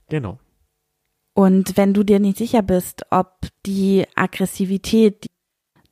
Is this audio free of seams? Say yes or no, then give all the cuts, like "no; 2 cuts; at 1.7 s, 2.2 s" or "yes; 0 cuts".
yes; 0 cuts